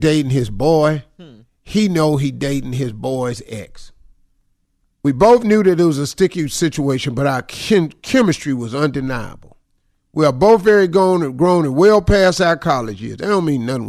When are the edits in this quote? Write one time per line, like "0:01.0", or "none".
none